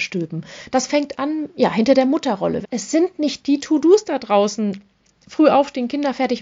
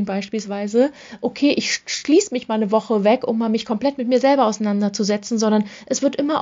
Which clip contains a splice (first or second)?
first